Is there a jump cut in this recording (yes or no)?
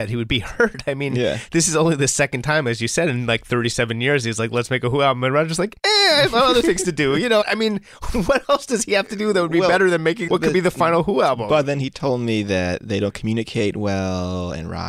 no